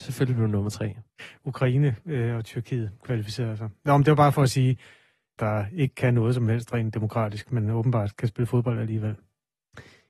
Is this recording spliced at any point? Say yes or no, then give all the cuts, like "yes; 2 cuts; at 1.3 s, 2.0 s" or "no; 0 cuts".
yes; 1 cut; at 5.4 s